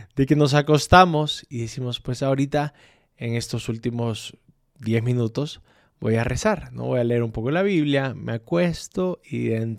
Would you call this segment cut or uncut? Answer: uncut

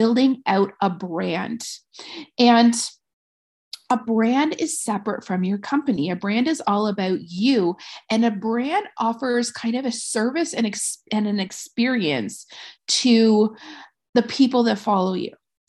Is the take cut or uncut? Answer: uncut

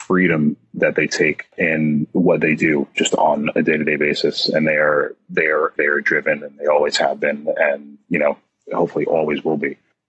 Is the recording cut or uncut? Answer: cut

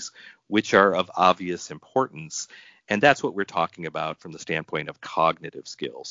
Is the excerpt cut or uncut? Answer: uncut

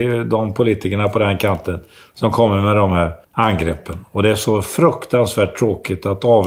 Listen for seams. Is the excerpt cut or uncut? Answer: cut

